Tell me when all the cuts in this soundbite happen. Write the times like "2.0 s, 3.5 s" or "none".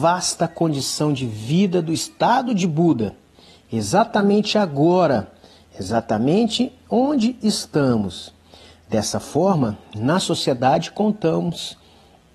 none